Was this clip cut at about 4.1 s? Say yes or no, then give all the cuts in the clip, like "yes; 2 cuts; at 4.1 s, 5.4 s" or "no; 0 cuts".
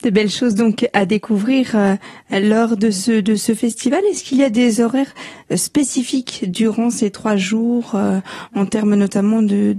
no; 0 cuts